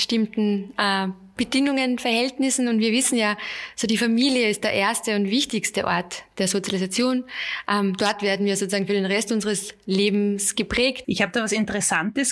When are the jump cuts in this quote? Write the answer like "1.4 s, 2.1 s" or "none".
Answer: 11.0 s